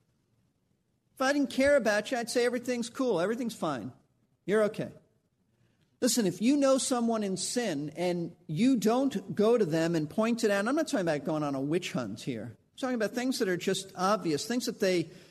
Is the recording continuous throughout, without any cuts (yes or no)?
yes